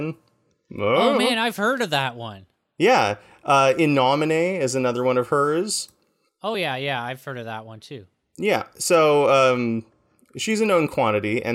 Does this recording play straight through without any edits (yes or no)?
yes